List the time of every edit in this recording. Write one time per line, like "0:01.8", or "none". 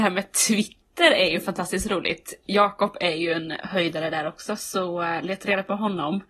none

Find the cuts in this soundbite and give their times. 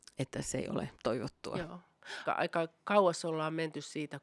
0:00.9
0:02.2

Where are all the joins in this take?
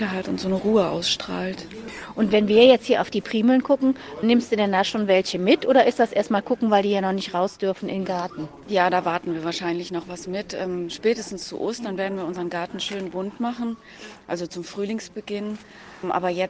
none

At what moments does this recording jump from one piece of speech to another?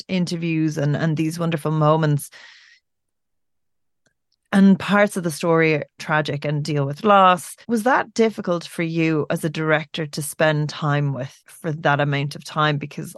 0:06.0
0:07.6
0:11.4

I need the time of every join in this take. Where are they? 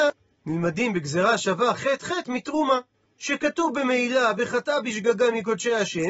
none

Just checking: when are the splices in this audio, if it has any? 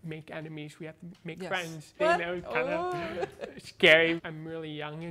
0:02.0
0:04.2

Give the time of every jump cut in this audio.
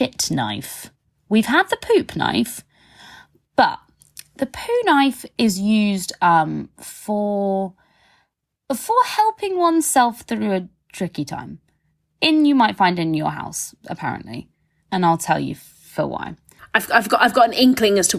0:14.8

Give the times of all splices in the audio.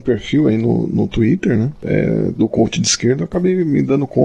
none

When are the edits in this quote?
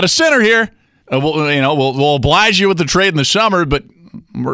0:01.0

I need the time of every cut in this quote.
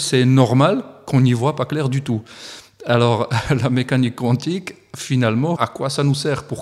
0:05.6

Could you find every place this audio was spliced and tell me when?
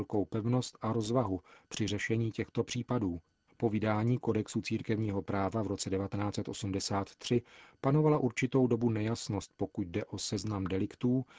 0:03.5

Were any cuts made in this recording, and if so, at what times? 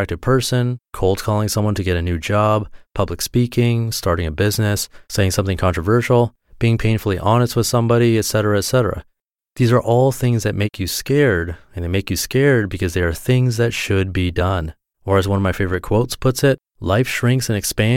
0:14.9
0:16.7

